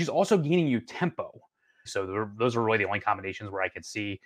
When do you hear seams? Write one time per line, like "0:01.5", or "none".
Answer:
0:01.9